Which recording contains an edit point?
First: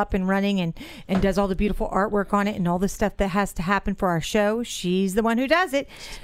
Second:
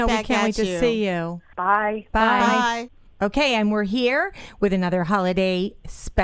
second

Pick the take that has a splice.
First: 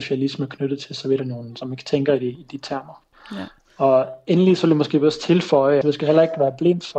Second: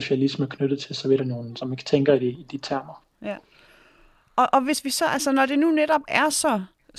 first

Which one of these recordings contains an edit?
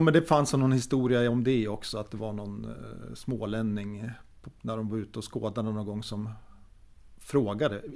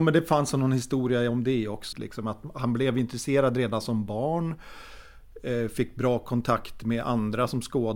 second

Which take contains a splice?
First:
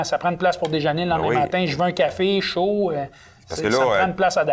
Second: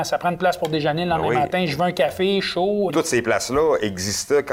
second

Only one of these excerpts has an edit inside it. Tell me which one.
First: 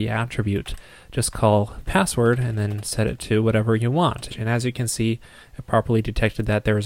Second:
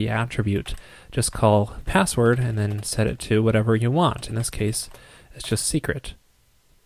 first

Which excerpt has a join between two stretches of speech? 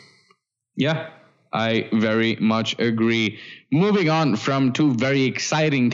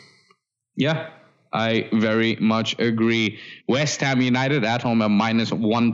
second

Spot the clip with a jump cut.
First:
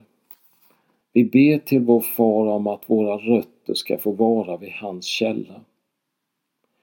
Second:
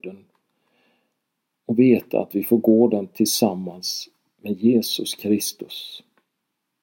first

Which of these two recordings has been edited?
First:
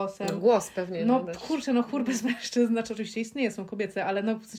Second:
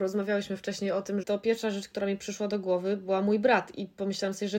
second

